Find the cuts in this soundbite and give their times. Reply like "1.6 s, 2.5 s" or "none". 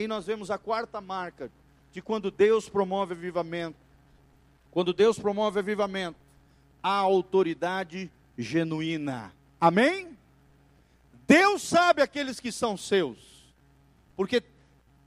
none